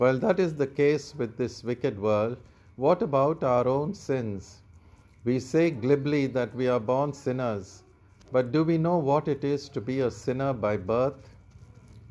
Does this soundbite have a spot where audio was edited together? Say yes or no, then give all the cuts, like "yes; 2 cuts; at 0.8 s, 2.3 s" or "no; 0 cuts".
no; 0 cuts